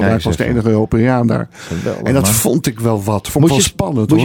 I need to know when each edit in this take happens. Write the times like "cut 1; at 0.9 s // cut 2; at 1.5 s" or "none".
none